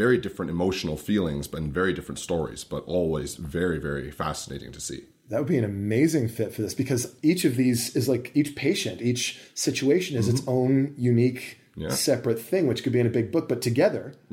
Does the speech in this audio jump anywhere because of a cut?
no; 0 cuts

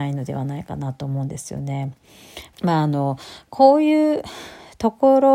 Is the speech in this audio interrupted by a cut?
yes; 1 cut; at 2.5 s

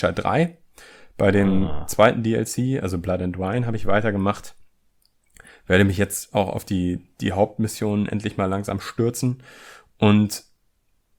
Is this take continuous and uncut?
yes; 0 cuts

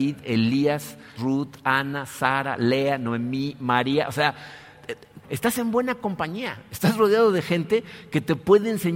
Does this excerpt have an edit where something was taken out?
yes; 2 cuts; at 1.2 s, 5.2 s

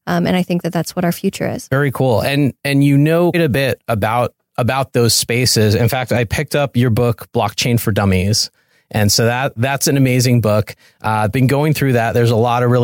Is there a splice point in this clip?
yes; 1 cut; at 3.3 s

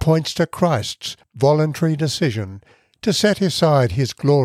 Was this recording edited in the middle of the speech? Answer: no; 0 cuts

